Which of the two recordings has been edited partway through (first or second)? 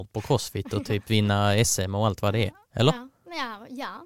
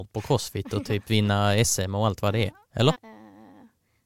second